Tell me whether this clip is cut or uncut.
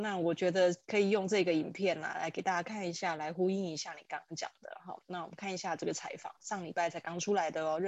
uncut